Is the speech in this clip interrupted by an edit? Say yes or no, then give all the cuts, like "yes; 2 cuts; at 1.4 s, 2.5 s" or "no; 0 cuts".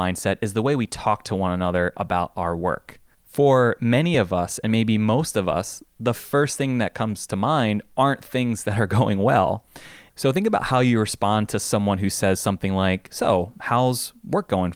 yes; 2 cuts; at 3.1 s, 10.1 s